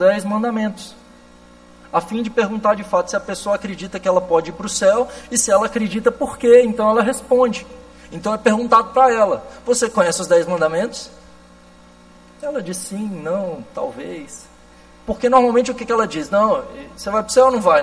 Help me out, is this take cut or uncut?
uncut